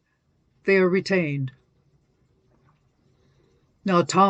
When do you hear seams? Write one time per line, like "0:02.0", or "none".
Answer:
none